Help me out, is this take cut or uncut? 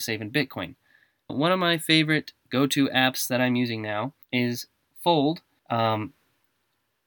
cut